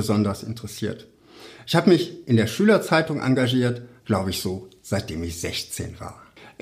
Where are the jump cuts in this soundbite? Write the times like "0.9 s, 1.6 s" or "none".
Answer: 4.0 s